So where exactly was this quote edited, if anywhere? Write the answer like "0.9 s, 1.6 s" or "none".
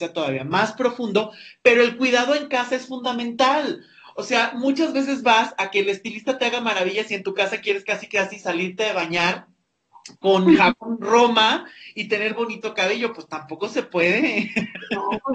none

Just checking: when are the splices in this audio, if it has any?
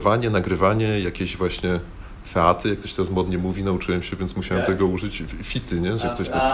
none

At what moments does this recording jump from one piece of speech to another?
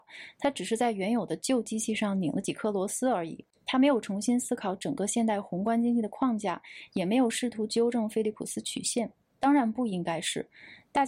9.3 s

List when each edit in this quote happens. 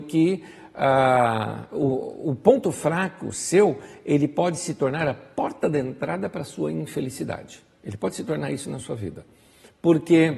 none

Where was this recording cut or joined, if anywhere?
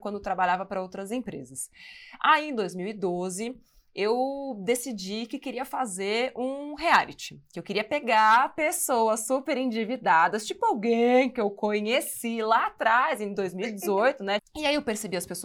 14.4 s

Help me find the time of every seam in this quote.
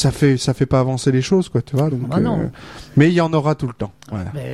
none

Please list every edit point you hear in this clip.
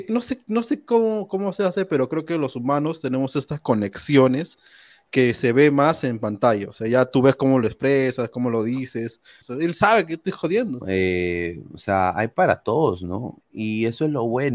9.4 s, 10.8 s, 13.4 s

